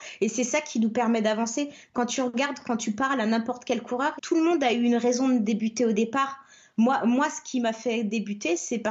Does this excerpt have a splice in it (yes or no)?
yes